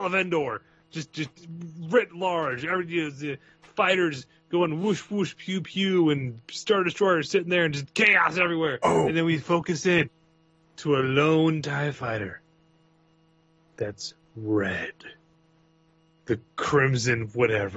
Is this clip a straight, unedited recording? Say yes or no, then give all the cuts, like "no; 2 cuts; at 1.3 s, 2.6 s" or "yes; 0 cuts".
yes; 0 cuts